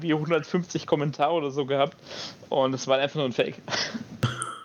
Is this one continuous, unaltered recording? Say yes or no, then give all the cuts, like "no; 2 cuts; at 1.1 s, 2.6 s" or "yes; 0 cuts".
yes; 0 cuts